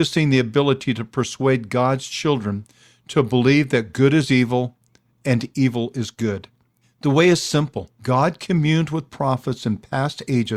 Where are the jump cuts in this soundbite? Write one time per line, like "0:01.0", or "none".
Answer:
0:06.8
0:07.9